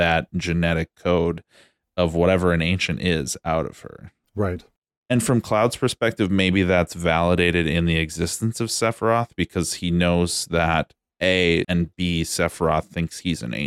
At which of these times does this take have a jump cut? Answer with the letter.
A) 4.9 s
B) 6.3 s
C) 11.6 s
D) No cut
C